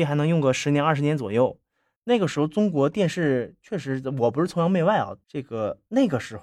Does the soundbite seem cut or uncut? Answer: cut